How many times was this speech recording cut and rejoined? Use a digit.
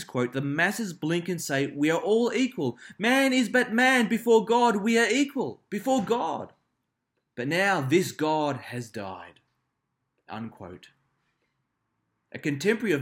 0